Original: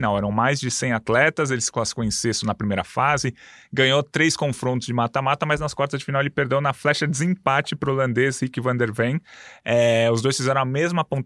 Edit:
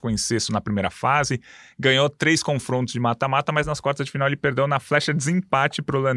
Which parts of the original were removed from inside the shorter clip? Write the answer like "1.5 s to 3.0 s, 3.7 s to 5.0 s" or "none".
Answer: none